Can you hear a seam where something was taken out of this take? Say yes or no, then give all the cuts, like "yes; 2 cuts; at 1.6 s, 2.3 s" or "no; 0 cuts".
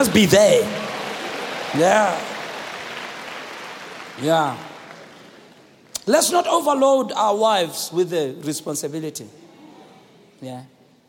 no; 0 cuts